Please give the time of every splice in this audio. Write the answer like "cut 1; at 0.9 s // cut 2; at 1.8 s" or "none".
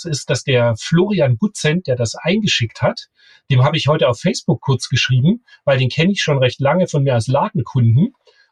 none